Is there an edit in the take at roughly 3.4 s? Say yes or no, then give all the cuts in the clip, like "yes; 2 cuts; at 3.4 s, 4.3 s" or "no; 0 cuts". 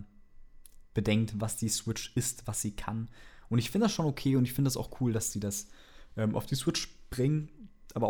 no; 0 cuts